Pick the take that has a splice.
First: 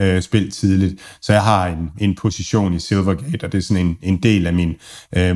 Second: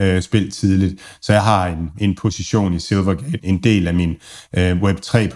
second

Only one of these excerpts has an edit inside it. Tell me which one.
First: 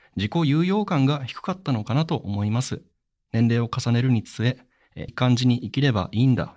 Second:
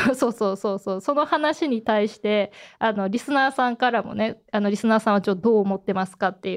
first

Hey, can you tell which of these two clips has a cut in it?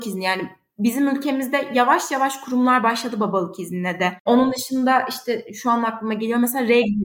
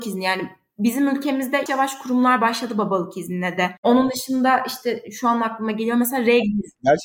second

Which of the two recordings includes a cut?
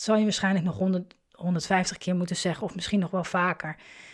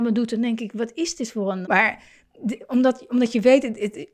second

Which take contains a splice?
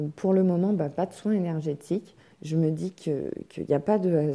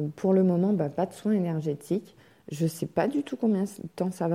first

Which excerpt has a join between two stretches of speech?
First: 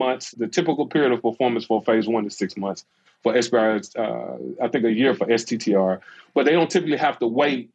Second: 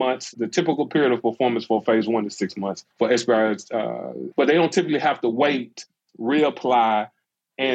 second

